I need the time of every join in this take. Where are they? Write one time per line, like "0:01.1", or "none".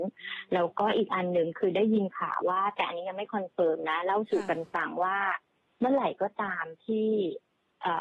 0:02.4